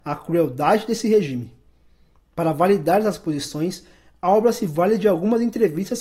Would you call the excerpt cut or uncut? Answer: uncut